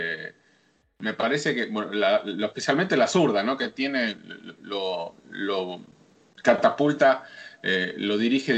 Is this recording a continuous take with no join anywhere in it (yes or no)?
yes